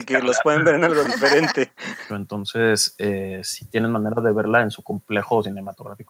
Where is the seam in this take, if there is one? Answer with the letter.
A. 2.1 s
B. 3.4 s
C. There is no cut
A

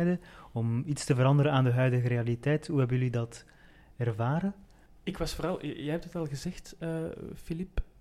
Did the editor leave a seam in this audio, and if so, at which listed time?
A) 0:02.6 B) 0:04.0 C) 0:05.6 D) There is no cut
D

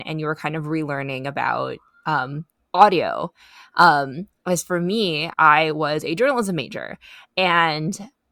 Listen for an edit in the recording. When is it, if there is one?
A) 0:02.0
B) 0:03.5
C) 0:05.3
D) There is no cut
C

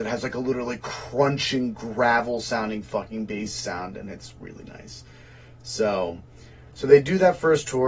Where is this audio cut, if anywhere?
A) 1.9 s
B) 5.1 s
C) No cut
C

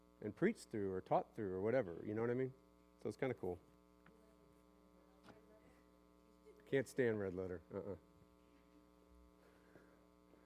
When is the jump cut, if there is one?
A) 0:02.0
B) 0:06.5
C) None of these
C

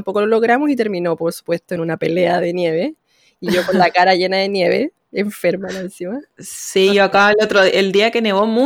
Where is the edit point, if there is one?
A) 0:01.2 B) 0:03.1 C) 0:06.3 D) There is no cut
C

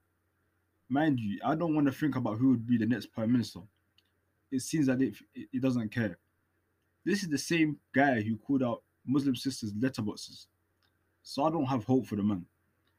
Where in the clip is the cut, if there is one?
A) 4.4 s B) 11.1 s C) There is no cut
A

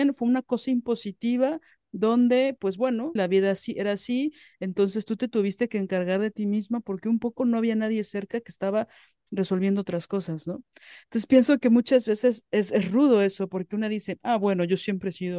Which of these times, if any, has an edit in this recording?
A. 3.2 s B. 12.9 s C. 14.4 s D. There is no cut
A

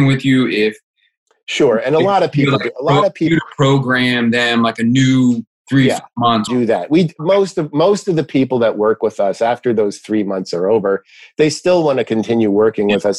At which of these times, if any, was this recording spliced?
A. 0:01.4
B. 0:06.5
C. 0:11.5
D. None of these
B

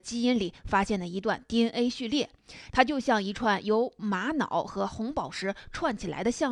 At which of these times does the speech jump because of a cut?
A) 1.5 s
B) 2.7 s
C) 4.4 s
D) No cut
B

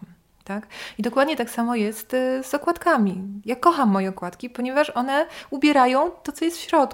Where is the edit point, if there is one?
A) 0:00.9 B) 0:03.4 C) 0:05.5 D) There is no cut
D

